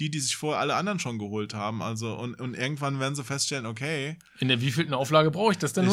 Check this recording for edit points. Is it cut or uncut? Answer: uncut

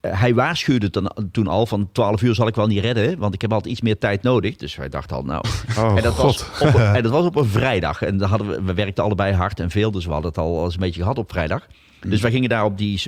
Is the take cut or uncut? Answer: uncut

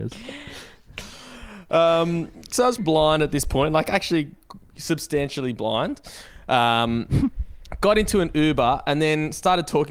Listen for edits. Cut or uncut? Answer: cut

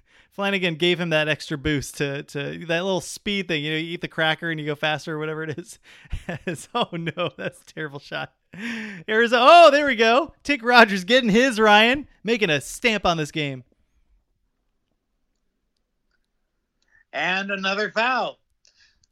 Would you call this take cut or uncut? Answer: uncut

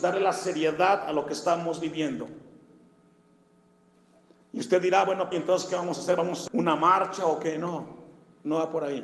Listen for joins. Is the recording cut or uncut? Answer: cut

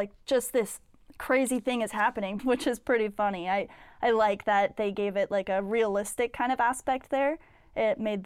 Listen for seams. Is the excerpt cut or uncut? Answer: cut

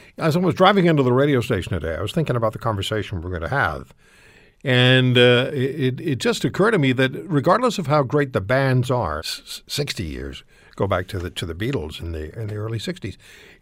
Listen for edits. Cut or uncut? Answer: cut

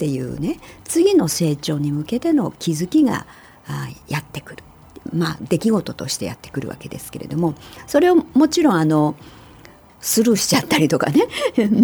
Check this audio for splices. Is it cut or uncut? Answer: uncut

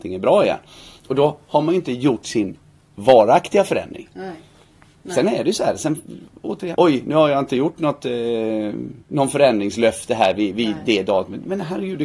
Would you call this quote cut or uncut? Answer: cut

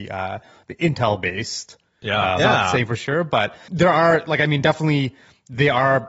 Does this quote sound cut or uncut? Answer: cut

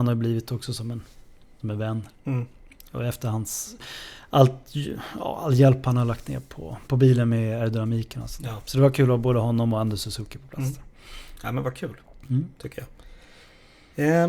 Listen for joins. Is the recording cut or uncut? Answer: uncut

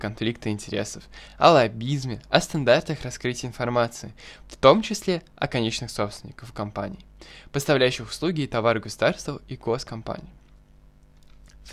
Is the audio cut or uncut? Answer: uncut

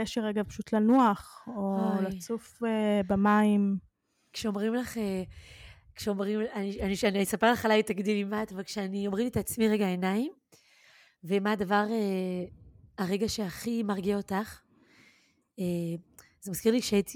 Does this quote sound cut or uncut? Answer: uncut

